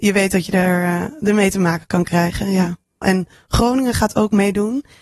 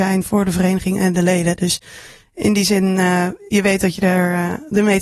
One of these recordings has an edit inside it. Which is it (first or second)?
first